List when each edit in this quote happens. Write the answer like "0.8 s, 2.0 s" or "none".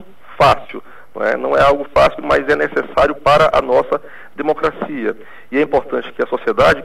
none

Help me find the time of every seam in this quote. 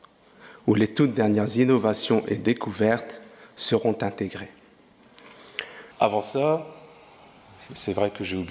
5.9 s

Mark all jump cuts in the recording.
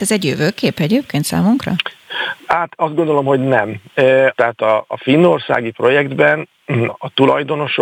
4.3 s, 6.9 s

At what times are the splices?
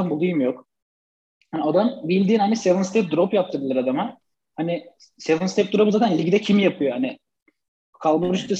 none

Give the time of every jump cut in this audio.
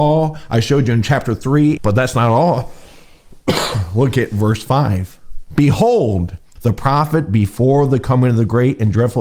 1.8 s, 6.6 s

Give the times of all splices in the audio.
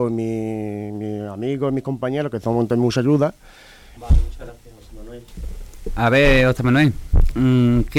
4.0 s

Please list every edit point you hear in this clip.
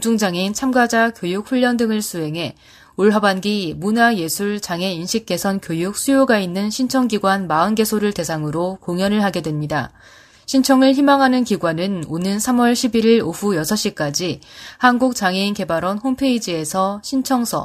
none

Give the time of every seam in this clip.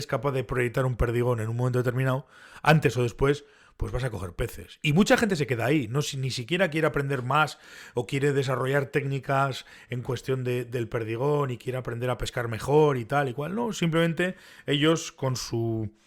none

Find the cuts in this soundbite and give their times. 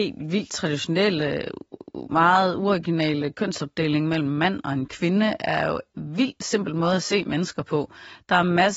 none

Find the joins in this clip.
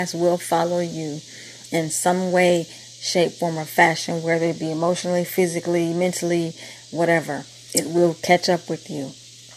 none

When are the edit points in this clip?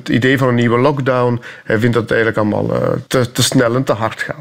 3.1 s

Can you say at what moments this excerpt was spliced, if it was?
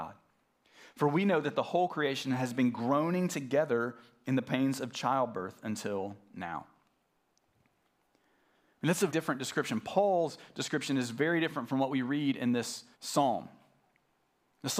9.1 s, 12.9 s

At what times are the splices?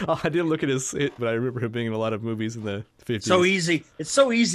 1.2 s

